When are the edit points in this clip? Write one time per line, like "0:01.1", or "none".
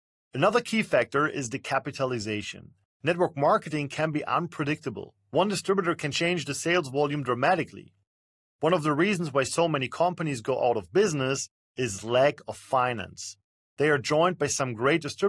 0:02.8